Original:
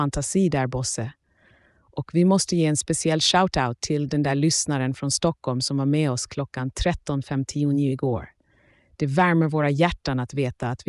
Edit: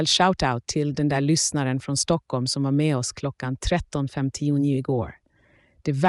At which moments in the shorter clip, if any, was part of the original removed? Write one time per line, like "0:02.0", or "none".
none